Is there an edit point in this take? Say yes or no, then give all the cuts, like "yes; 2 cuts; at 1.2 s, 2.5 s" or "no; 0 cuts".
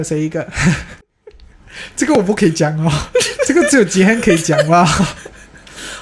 yes; 1 cut; at 1.0 s